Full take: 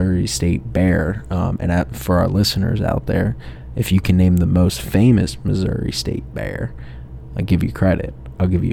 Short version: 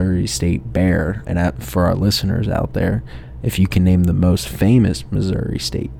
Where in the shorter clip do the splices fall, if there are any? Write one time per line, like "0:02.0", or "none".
0:01.2